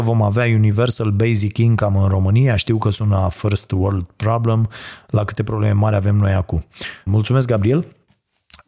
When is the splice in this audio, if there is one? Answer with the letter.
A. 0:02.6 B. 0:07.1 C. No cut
B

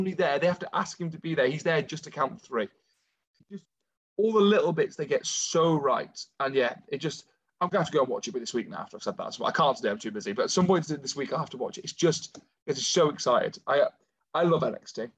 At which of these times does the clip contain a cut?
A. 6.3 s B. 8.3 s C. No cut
B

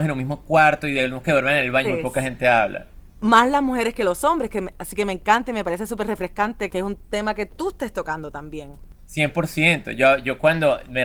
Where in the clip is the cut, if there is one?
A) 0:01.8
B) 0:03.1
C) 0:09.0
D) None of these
A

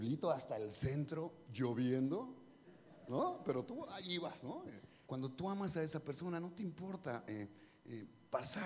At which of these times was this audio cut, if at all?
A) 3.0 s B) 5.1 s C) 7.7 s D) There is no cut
B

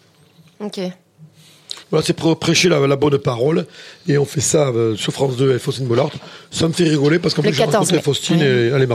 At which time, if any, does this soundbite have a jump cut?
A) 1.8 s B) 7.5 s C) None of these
A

